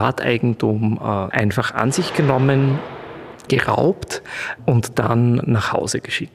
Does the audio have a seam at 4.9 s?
no; 2 cuts; at 1.3 s, 3.5 s

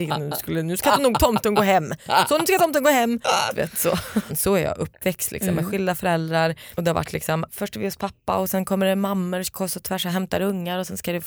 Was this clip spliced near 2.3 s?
no; 2 cuts; at 4.3 s, 7.5 s

